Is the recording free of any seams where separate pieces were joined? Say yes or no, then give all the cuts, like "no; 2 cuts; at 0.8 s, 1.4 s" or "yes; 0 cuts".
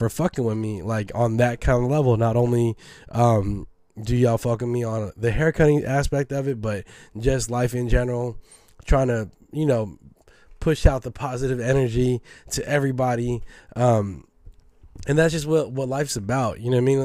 yes; 0 cuts